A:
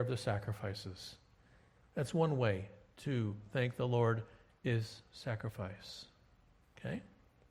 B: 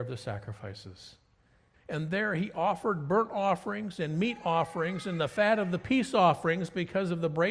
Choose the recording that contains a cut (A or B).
B